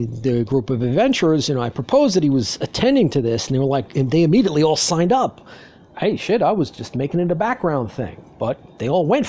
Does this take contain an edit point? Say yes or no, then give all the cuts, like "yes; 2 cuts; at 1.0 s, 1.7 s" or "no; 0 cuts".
no; 0 cuts